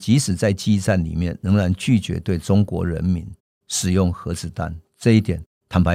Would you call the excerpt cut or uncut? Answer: uncut